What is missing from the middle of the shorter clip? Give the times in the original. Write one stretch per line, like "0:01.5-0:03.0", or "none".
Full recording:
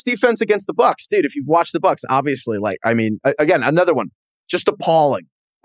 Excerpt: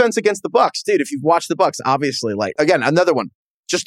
0:02.8-0:03.4